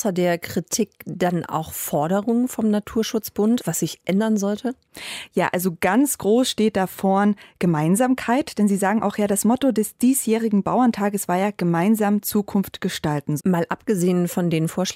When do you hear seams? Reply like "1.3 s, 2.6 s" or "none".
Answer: 3.6 s, 13.4 s